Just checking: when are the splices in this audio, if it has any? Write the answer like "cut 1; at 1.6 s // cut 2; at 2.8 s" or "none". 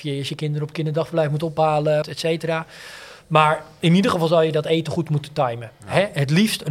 cut 1; at 2.0 s

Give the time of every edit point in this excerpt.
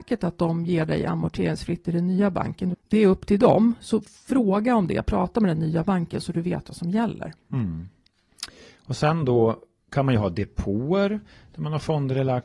cut 1; at 2.7 s

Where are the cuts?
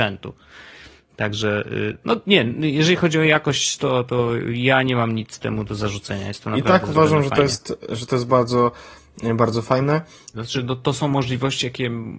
cut 1; at 10.3 s

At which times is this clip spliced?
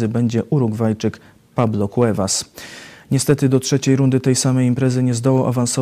none

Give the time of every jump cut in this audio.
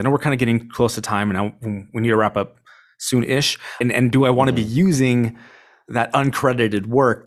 cut 1; at 3.8 s

